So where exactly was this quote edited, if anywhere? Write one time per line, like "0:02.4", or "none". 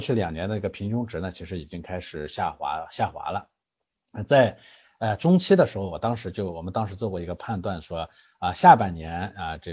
none